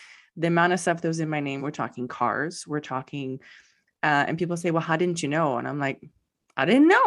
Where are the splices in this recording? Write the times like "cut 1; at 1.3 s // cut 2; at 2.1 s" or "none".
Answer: cut 1; at 1.6 s